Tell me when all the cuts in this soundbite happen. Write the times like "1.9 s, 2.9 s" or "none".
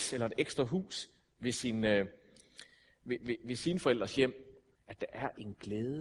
4.8 s